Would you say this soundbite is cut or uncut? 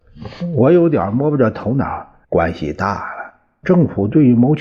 cut